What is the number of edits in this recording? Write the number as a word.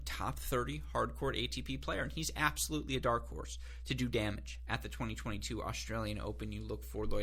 zero